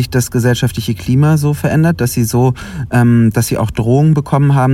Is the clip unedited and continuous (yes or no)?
yes